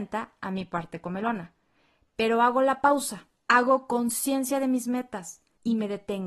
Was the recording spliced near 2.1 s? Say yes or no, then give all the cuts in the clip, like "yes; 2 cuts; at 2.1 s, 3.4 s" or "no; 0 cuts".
no; 0 cuts